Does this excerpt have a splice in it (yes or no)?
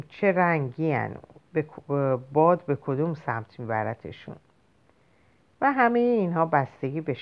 no